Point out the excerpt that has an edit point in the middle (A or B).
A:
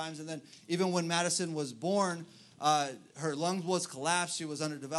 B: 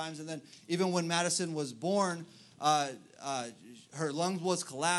A